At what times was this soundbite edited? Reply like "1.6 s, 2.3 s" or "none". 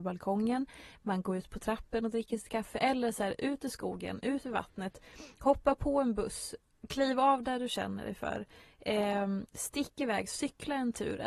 none